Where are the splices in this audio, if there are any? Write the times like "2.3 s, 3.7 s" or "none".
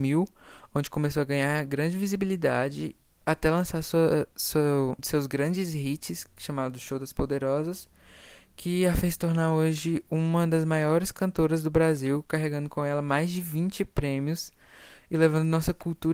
5.0 s